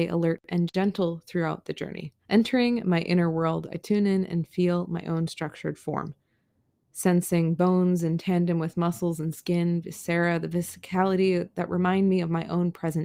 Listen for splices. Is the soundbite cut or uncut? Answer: cut